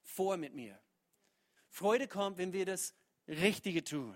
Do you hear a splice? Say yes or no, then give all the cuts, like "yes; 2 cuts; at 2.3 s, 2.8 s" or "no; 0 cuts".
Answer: yes; 1 cut; at 1.6 s